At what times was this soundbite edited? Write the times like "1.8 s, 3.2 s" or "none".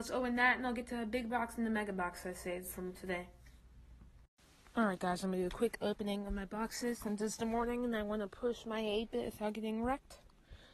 none